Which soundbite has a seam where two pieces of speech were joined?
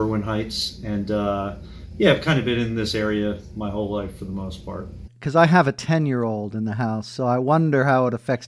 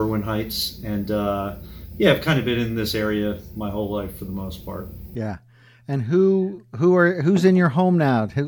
first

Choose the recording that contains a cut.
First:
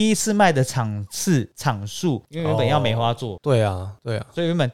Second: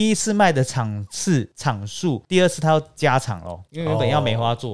first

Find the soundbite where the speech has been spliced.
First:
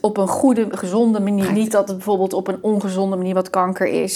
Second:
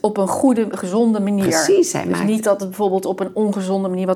first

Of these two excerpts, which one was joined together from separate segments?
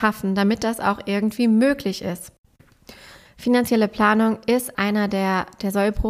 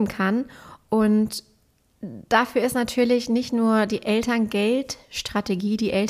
first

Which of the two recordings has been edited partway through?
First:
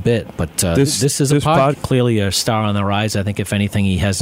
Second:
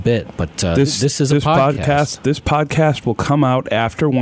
first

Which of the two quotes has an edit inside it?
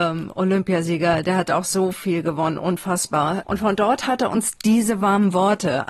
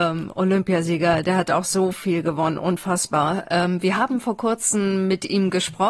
first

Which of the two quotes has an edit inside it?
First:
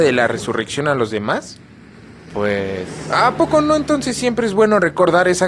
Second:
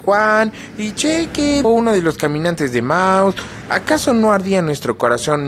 second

